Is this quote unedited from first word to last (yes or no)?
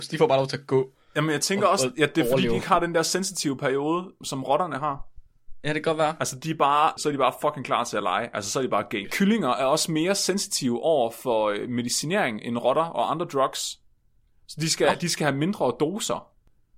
no